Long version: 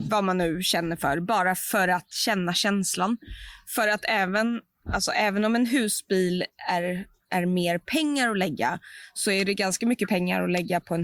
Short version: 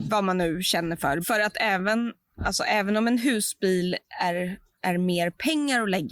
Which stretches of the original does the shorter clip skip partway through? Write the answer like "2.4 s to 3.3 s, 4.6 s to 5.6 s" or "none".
1.2 s to 3.7 s